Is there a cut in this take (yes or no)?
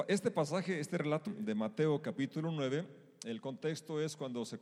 yes